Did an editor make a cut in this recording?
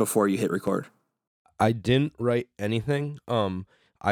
no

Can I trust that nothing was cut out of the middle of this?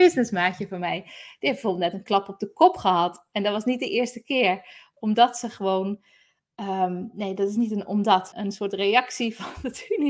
no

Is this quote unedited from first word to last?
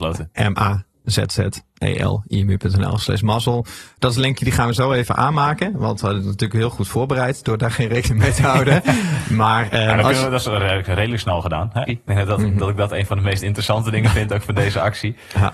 no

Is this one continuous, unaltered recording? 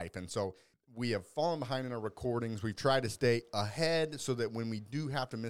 yes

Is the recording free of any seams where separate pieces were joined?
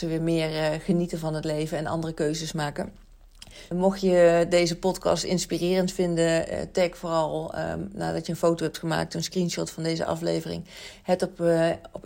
no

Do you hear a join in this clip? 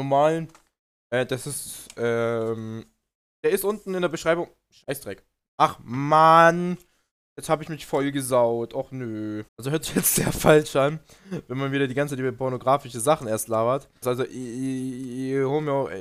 yes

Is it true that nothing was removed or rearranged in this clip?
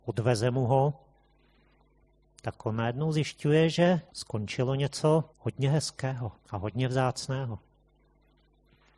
no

